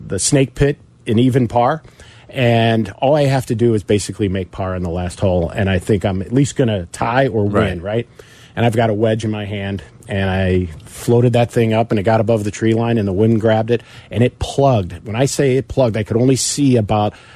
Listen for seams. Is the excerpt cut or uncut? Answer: uncut